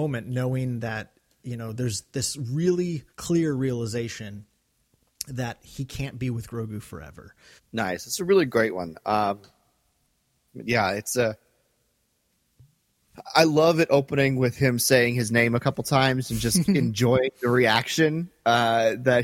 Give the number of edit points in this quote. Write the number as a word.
two